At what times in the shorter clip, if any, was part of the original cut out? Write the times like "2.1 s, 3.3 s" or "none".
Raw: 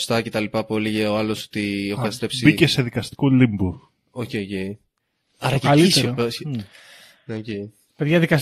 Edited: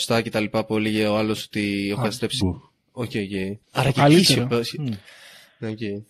2.4 s, 3.6 s

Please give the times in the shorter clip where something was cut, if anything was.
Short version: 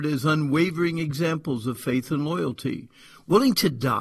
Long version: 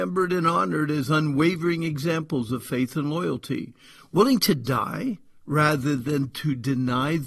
none

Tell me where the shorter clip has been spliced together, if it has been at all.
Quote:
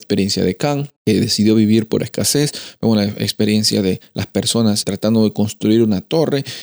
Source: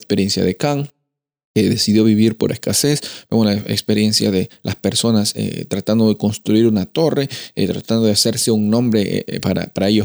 1.0 s, 4.8 s

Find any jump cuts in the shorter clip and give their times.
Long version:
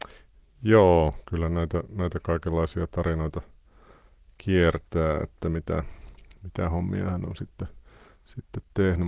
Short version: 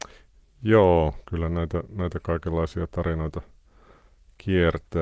none

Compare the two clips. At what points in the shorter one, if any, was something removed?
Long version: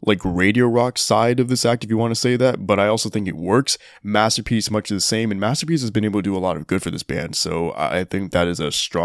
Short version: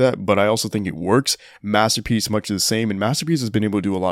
none

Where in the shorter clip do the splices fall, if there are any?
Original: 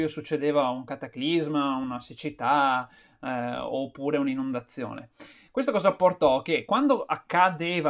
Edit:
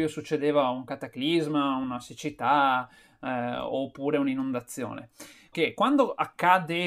5.5 s

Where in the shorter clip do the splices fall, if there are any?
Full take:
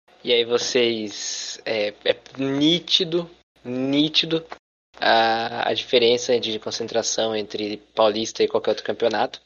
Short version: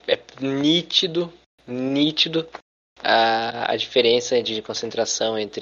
none

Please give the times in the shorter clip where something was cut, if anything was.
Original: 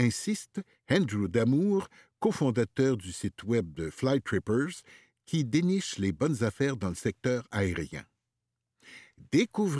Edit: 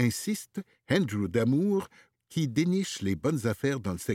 2.1 s

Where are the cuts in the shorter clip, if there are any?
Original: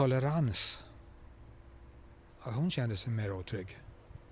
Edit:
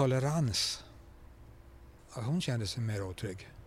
2.0 s

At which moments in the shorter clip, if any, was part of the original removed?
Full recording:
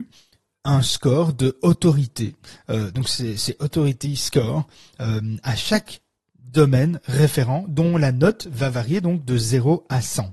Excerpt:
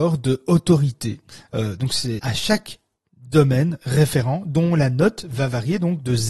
2.2 s

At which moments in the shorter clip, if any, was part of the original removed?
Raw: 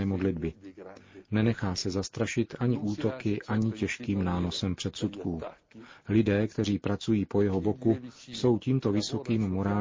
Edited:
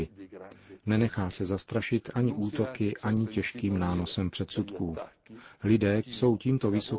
6.0 s

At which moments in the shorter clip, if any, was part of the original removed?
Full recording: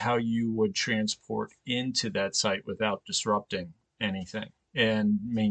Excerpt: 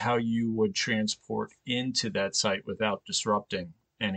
none

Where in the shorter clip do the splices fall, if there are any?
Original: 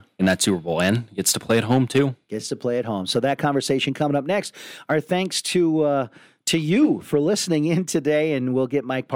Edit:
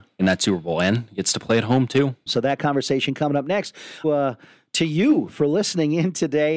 2.3 s, 4.0 s

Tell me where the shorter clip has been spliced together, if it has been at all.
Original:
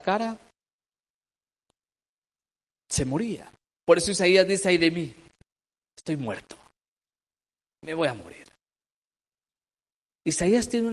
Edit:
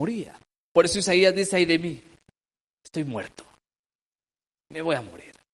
none

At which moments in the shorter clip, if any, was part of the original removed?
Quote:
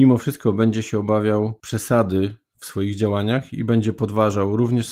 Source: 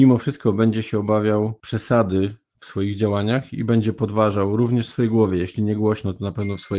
none

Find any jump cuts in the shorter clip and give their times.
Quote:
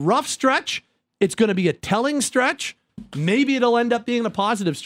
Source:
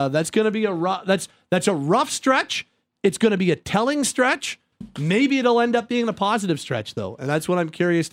none

